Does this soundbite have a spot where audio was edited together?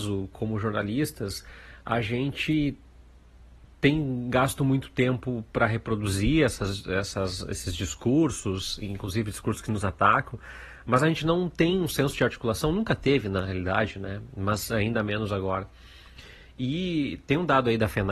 no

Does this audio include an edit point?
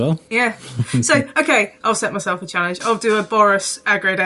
yes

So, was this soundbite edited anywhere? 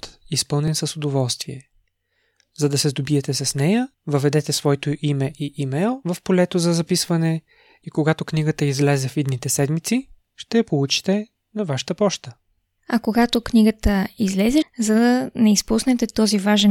yes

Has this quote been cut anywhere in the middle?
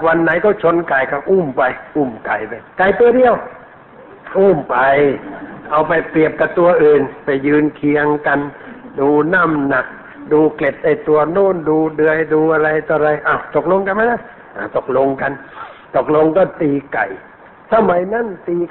yes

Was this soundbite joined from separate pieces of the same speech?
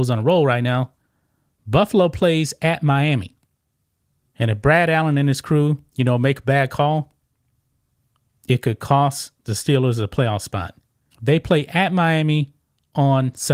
yes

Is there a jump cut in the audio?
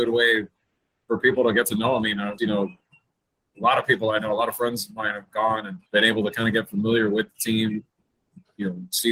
yes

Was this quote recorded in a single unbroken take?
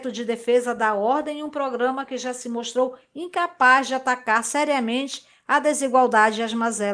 yes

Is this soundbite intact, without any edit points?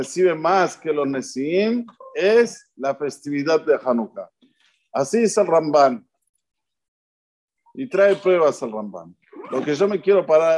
yes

